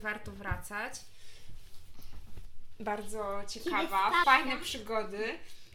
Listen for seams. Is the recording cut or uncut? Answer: cut